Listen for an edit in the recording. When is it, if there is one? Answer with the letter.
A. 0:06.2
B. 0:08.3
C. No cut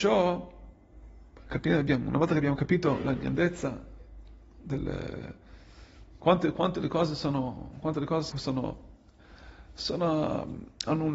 B